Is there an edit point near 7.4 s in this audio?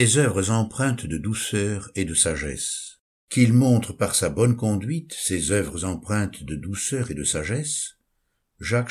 no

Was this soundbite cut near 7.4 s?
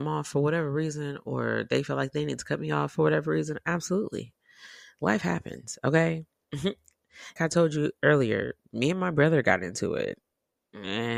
yes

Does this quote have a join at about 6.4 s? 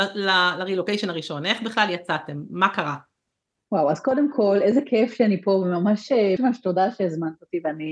yes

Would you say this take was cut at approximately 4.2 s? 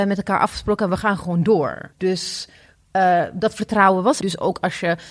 yes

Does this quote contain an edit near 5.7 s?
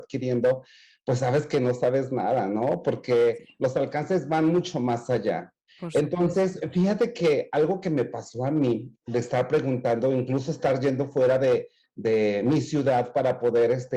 yes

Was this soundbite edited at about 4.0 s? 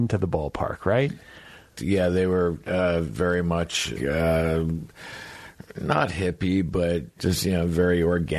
yes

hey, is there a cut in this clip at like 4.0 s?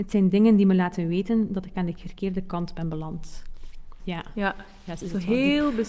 yes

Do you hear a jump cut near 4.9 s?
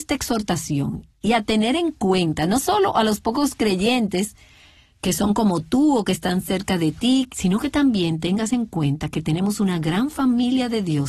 no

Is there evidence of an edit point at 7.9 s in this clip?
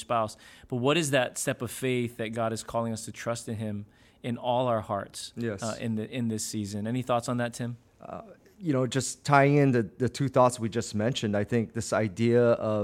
yes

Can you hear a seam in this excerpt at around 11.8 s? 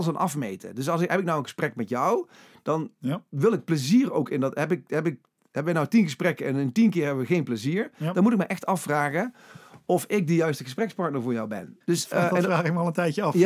yes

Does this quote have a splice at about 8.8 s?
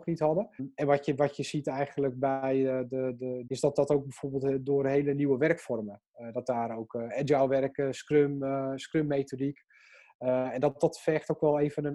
no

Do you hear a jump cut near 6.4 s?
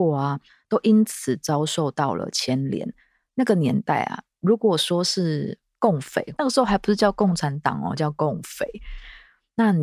yes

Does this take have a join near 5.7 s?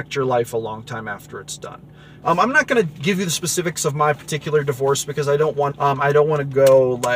yes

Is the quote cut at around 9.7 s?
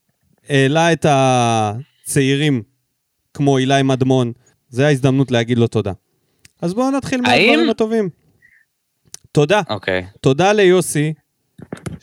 no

